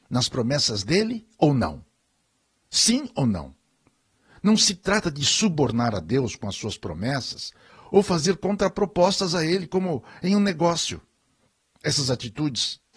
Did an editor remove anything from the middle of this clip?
no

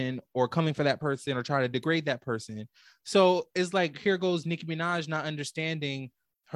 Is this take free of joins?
yes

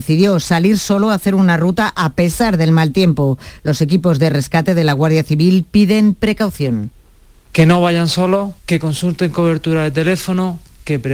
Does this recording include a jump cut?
no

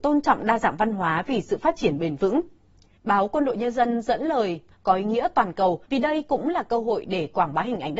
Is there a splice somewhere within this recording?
yes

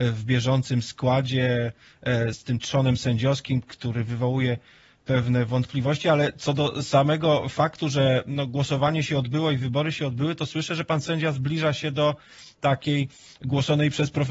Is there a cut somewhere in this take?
yes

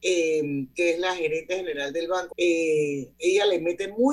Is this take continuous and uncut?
no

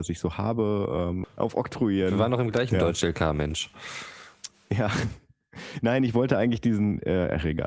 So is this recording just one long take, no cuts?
no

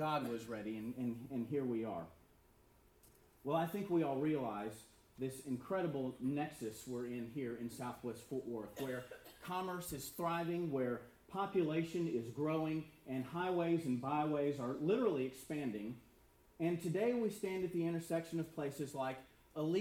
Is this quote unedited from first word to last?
yes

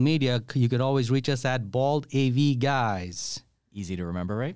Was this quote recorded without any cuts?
yes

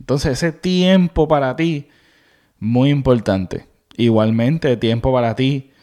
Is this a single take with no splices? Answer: yes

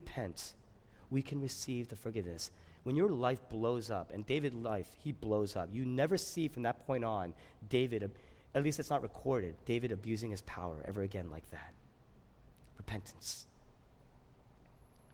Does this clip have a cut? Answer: no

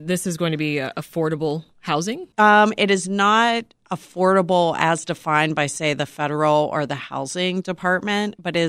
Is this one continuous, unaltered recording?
no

